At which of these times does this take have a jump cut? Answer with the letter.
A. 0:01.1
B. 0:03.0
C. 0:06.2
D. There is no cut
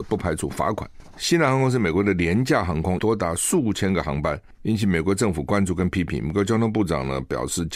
B